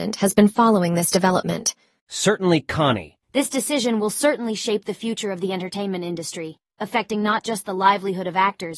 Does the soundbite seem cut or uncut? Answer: cut